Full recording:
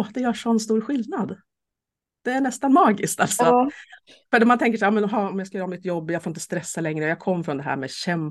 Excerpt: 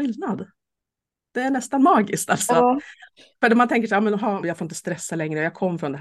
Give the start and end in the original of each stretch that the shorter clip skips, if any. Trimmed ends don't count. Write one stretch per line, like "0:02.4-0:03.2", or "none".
0:05.3-0:06.1

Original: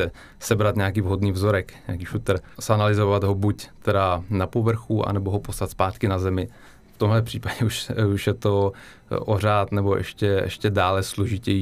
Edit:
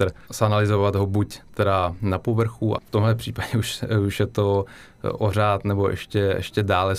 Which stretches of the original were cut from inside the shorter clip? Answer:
0:05.1-0:06.8

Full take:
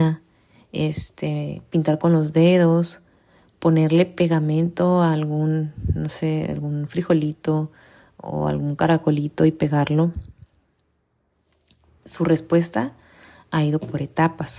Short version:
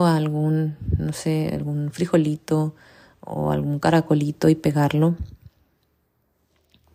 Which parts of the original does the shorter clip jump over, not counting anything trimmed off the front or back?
none

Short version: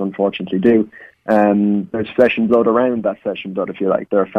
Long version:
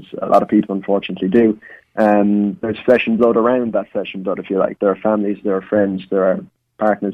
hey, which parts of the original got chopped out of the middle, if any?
none

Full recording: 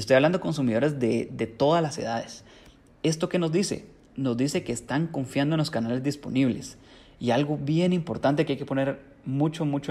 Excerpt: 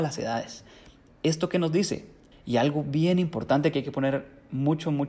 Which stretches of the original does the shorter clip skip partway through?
0:04.1-0:07.1

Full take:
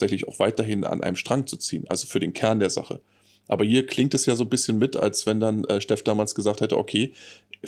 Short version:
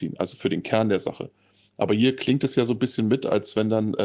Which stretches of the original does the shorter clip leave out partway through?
none

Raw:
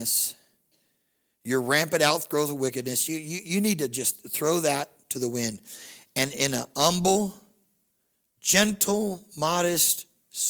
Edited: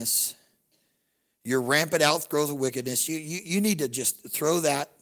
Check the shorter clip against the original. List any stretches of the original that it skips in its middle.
none

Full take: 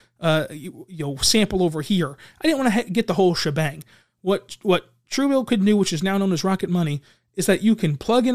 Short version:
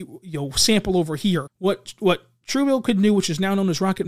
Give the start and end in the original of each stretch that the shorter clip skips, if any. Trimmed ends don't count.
0:02.1-0:04.1

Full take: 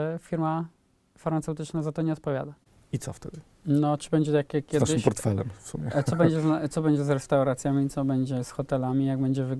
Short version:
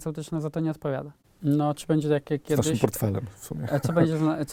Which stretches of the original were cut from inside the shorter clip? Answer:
0:02.7-0:03.5

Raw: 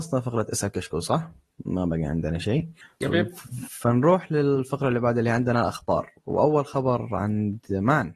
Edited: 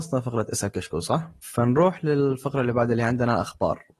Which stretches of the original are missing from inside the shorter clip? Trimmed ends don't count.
0:01.4-0:03.7

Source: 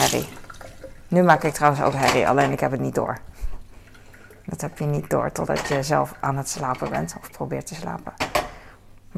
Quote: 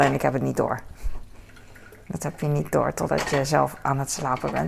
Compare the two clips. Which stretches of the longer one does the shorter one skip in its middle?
none

